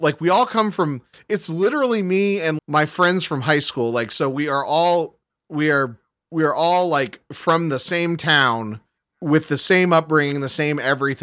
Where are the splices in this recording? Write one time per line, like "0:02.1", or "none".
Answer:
0:02.6